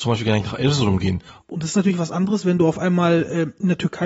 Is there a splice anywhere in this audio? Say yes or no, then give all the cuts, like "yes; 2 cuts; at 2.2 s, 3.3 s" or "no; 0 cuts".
yes; 1 cut; at 1.4 s